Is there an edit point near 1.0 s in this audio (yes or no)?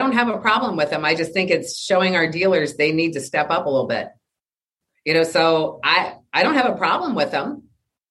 no